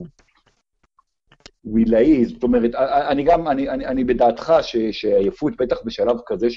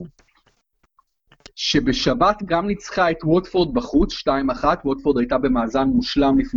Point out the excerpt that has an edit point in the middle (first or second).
second